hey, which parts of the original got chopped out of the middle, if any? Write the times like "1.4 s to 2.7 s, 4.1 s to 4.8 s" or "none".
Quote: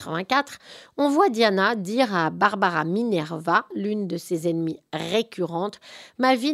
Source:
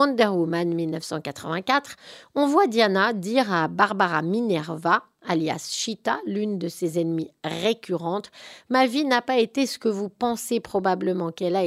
5.1 s to 6.2 s